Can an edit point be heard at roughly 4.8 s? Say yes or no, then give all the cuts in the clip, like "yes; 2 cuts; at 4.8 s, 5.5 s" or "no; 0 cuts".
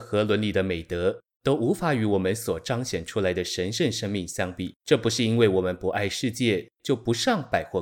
yes; 1 cut; at 4.8 s